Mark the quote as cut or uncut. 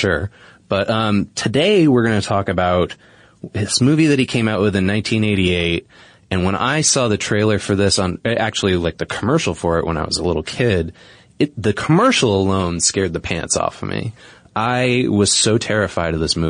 uncut